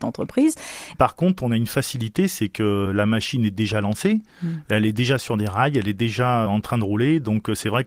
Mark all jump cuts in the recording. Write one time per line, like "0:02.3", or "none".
0:00.9